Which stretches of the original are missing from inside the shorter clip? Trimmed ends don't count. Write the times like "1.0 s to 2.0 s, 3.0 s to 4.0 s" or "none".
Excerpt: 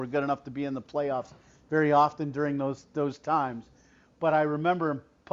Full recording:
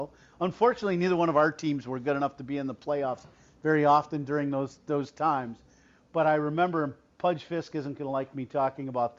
none